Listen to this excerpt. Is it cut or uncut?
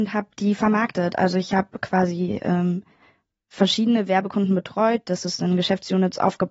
uncut